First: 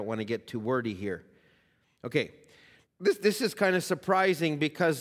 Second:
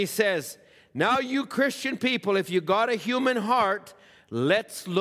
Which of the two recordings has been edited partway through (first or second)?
first